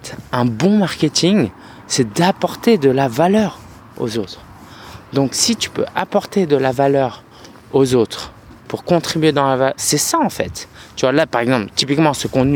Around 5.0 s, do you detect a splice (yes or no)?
no